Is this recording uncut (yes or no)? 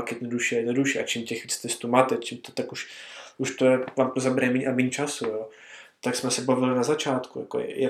yes